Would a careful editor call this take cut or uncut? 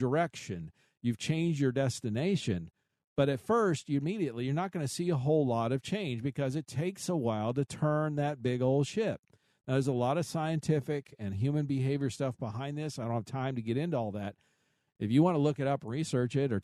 uncut